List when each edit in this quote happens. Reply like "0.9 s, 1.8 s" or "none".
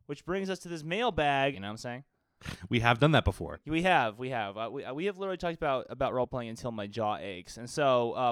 1.5 s